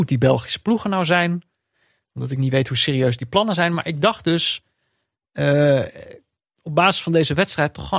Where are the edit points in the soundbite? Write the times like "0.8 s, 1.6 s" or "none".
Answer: none